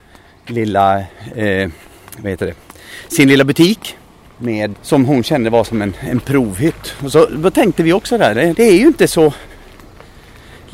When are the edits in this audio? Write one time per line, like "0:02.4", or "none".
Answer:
0:04.7
0:08.5